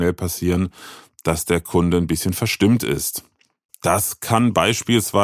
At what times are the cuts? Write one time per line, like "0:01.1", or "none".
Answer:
0:03.7